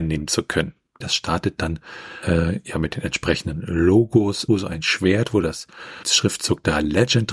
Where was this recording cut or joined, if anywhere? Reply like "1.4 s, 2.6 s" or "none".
1.0 s, 4.5 s

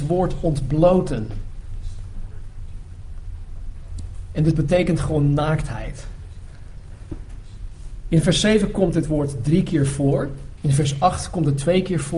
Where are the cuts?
10.6 s

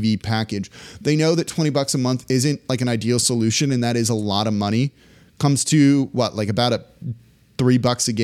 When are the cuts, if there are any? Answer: none

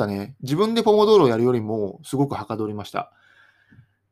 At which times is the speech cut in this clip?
none

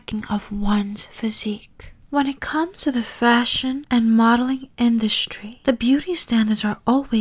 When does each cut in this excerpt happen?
none

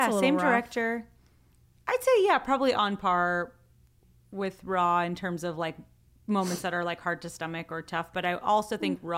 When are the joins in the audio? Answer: none

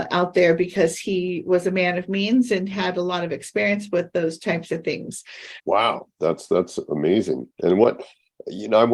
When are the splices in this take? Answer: 5.6 s

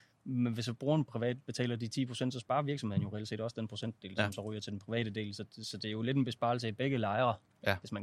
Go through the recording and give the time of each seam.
none

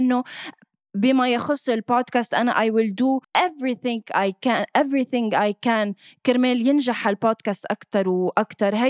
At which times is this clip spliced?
3.2 s

